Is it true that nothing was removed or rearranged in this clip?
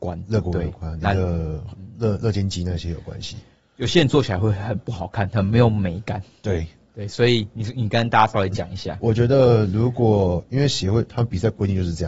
no; 1 cut; at 9.0 s

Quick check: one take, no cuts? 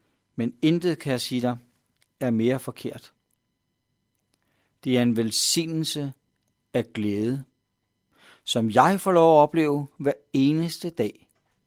yes; 0 cuts

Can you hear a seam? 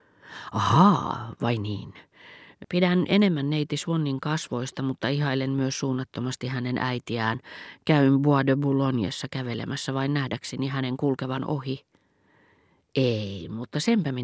yes; 1 cut; at 2.6 s

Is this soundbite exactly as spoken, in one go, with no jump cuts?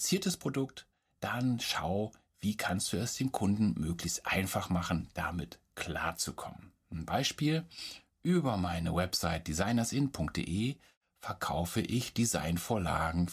yes; 0 cuts

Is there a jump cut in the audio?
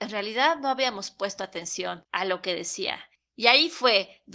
no; 0 cuts

